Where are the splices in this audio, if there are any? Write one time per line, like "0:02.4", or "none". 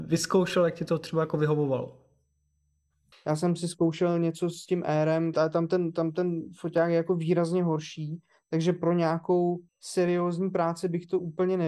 0:03.1
0:05.3
0:09.7